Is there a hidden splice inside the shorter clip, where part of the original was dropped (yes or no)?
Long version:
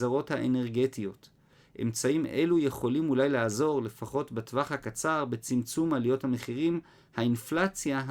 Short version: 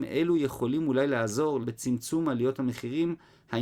yes